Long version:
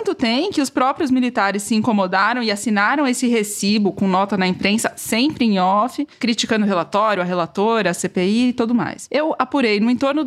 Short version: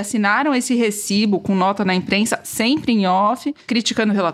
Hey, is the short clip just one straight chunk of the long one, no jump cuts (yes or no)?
yes